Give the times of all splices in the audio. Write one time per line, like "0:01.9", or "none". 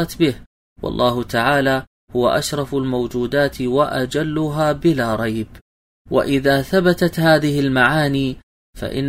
0:06.0